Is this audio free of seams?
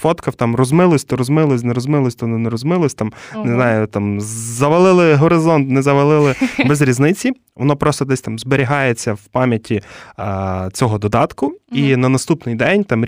yes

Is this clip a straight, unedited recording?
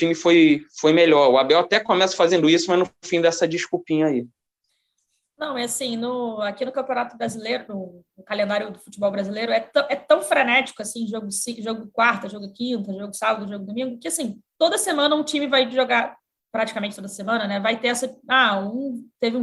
yes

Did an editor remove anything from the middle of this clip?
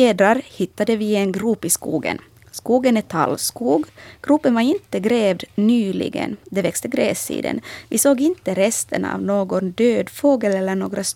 no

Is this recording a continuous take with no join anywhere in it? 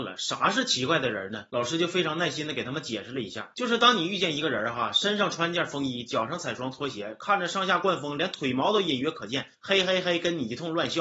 yes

